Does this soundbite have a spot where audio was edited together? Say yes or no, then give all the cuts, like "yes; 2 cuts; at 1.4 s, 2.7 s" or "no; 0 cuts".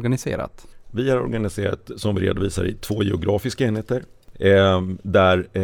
no; 0 cuts